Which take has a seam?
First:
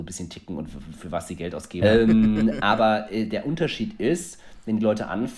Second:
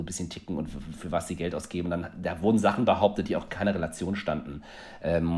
first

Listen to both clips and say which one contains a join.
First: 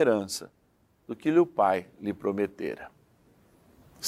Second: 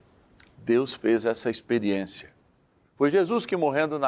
second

